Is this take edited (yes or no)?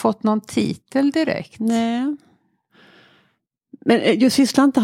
no